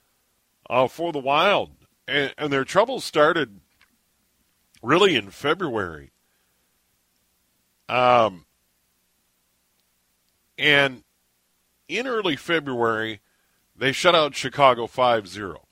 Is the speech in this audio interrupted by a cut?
no; 0 cuts

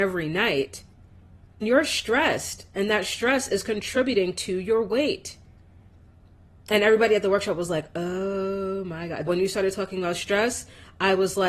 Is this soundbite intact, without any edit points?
no; 2 cuts; at 1.6 s, 9.3 s

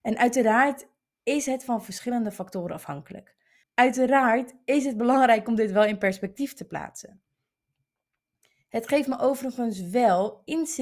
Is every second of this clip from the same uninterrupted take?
no; 1 cut; at 3.6 s

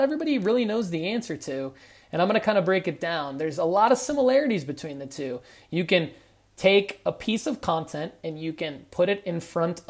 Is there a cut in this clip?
no; 0 cuts

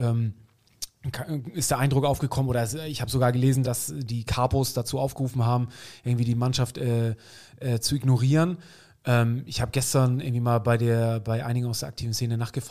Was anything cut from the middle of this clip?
yes; 1 cut; at 3.6 s

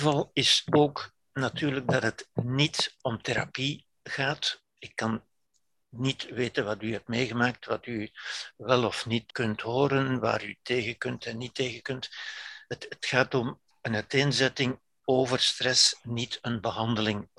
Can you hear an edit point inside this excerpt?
yes; 1 cut; at 9.3 s

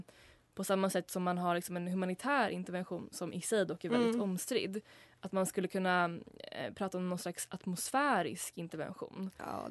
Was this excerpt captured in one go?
yes; 0 cuts

